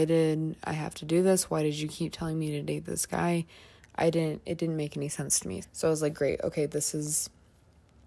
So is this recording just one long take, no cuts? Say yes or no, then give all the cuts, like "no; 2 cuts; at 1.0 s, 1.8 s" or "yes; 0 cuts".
no; 2 cuts; at 3.8 s, 5.6 s